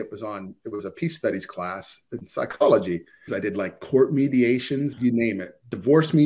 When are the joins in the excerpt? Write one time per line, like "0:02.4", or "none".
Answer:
0:03.3
0:04.9